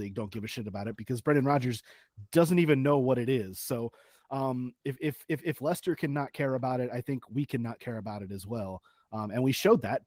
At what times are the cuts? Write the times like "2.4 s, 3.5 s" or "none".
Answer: none

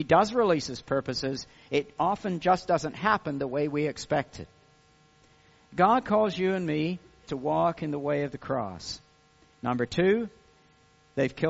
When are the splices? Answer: 7.3 s, 9.5 s

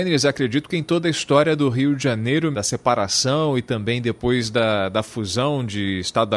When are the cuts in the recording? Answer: 2.5 s

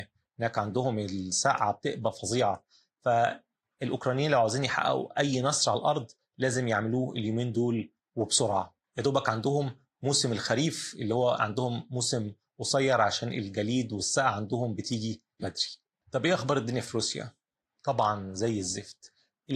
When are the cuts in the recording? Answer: 15.4 s

